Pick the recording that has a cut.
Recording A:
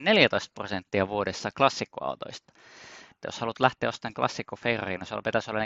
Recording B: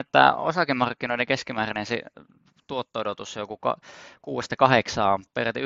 A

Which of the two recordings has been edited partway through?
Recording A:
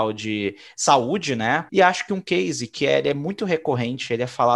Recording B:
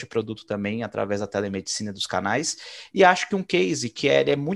A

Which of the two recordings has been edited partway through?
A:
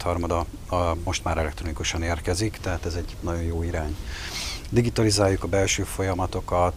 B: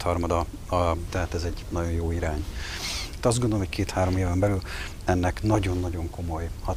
B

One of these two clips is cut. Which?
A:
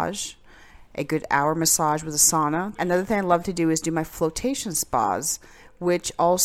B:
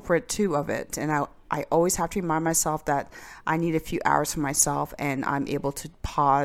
A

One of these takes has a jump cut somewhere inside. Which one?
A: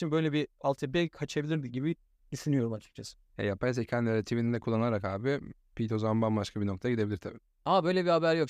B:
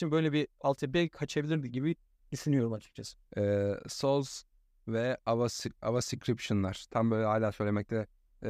B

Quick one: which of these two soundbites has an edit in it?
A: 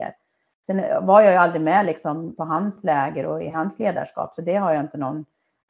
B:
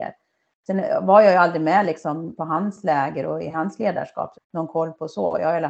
B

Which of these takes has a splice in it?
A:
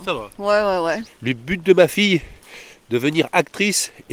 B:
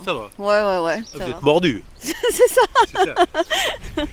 A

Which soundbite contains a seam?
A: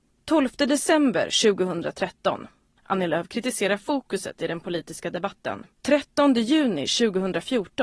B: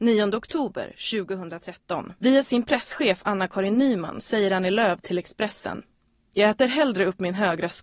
A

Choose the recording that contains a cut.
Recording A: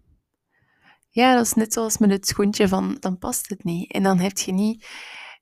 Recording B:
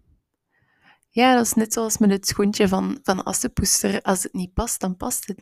A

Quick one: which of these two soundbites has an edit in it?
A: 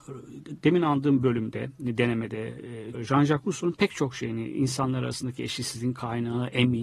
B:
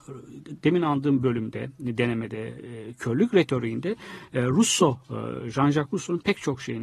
A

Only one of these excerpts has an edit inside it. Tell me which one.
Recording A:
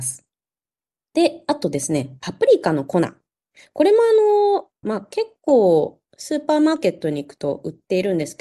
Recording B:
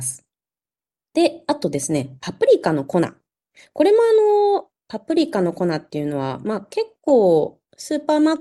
A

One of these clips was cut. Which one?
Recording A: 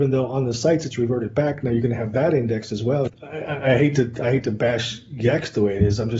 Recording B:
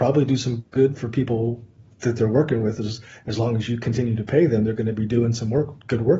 A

